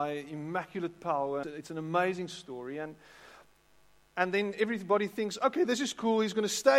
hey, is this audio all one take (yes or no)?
no